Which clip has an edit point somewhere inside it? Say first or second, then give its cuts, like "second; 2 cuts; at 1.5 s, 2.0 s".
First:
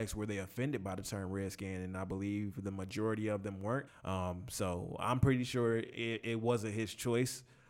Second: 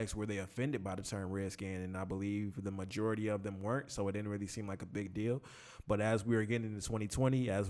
first; 1 cut; at 3.9 s